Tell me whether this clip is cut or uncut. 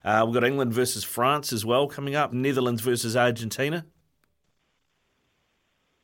cut